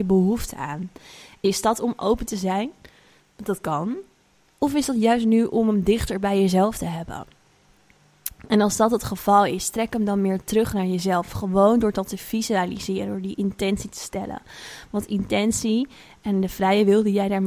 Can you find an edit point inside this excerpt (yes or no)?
no